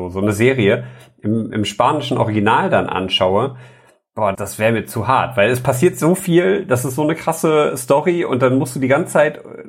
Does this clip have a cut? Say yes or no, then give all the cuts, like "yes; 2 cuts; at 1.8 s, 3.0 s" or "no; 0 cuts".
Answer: yes; 1 cut; at 4.3 s